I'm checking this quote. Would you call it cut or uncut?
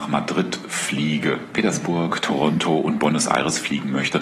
cut